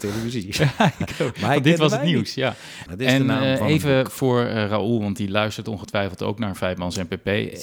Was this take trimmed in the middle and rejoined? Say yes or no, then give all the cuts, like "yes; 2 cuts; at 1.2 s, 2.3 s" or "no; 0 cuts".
yes; 1 cut; at 2.9 s